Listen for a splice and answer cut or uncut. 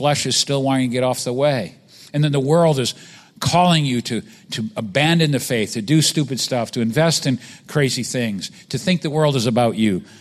uncut